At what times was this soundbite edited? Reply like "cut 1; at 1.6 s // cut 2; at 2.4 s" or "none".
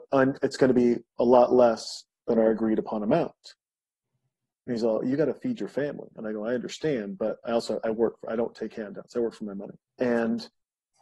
cut 1; at 9.9 s